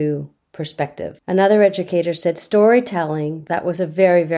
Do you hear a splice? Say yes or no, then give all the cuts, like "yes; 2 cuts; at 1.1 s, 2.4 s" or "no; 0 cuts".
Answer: no; 0 cuts